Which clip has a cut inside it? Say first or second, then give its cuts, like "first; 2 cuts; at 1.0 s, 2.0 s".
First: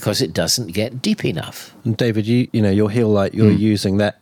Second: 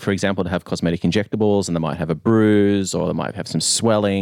first; 1 cut; at 2.5 s